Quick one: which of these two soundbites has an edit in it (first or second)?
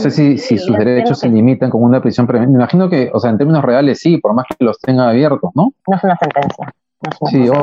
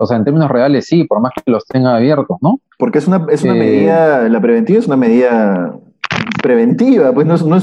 first